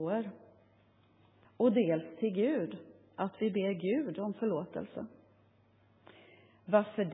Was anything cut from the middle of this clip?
yes; 1 cut; at 1.4 s

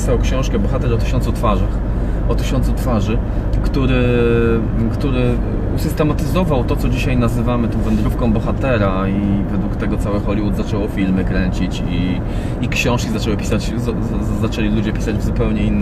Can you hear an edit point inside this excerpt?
no; 0 cuts

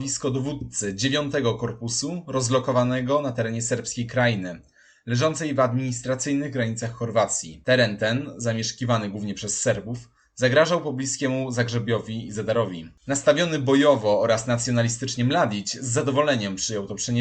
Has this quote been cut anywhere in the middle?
no; 0 cuts

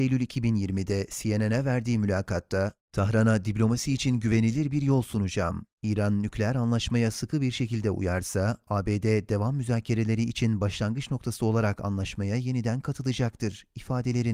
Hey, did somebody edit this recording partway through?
no; 0 cuts

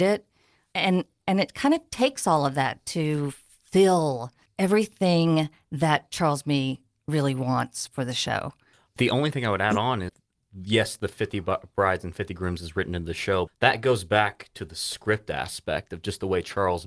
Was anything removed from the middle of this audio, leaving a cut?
yes; 1 cut; at 13.5 s

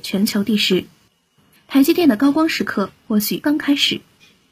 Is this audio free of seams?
no; 2 cuts; at 1.5 s, 3.4 s

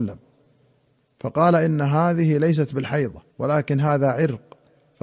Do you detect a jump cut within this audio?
yes; 1 cut; at 3.3 s

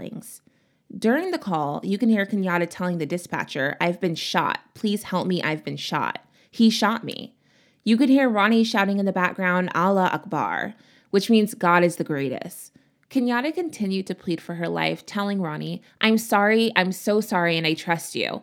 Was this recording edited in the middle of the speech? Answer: no; 0 cuts

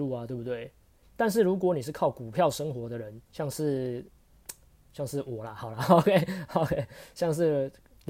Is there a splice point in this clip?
yes; 2 cuts; at 1.0 s, 3.2 s

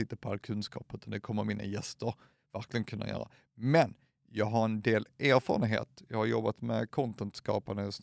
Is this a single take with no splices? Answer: yes; 0 cuts

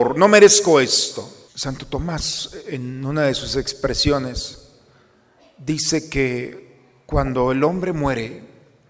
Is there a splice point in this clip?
yes; 1 cut; at 1.5 s

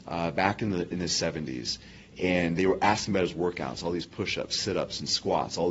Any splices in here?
no; 0 cuts

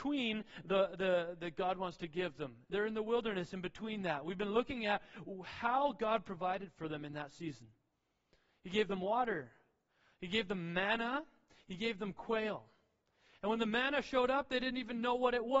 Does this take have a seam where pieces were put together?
yes; 1 cut; at 1.4 s

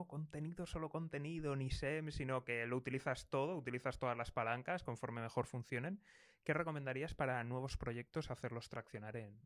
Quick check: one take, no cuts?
yes; 0 cuts

